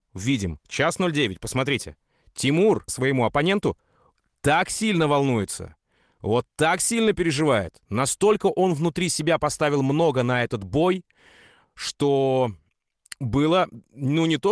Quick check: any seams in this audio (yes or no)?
yes